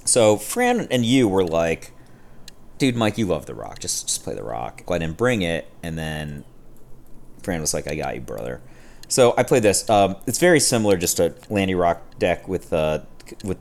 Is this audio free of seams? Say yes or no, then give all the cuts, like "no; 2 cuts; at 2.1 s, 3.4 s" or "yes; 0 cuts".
no; 1 cut; at 4.9 s